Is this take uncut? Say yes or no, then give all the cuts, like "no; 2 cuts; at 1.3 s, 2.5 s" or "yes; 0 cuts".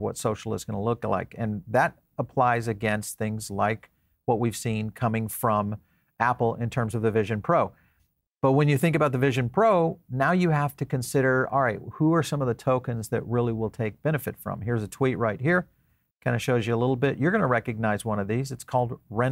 yes; 0 cuts